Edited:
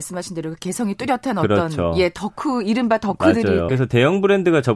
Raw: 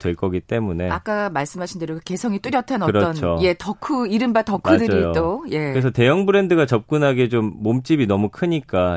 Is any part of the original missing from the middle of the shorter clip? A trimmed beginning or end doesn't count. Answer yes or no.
yes